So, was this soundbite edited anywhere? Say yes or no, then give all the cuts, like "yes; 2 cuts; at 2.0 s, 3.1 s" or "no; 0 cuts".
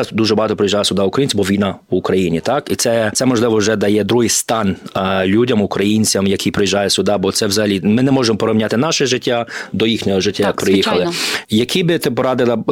yes; 1 cut; at 11.4 s